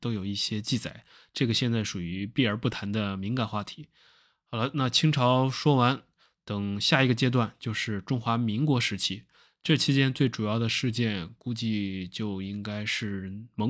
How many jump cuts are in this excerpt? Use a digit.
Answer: 0